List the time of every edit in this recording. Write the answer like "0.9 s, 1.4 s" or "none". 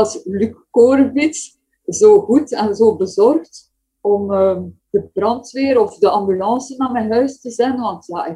4.8 s